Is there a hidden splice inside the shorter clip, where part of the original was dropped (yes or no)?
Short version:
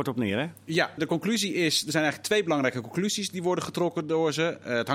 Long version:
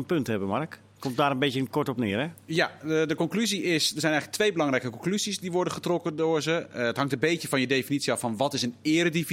yes